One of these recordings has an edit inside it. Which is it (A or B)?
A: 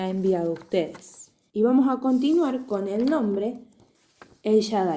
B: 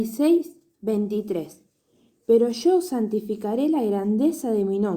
A